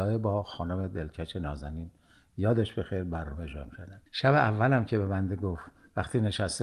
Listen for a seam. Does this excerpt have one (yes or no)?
yes